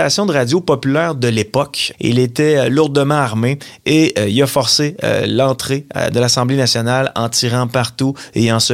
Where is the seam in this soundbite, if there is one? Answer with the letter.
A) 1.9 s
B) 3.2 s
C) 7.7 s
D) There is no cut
A